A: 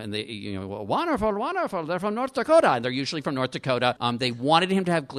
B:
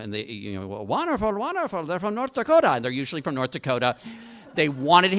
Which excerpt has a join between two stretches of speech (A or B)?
A